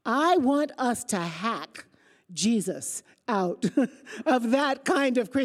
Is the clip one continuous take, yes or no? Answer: yes